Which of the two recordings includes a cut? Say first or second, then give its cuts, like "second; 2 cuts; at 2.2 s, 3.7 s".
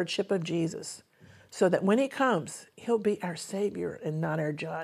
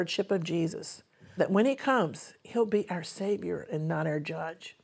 second; 1 cut; at 1.4 s